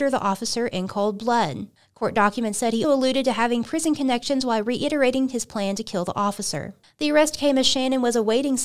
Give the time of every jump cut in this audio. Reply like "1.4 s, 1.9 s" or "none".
2.8 s

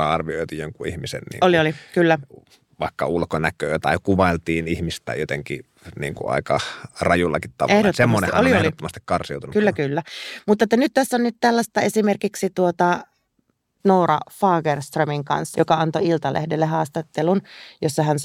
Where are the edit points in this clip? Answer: 9.5 s, 15.5 s

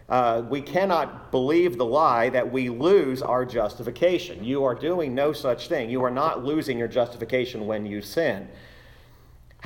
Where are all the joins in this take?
none

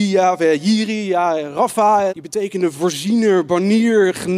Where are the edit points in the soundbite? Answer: 2.1 s

